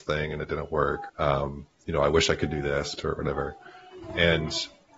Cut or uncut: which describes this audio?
cut